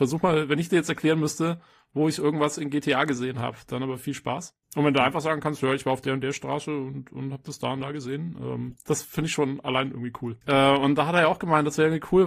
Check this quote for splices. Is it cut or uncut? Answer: cut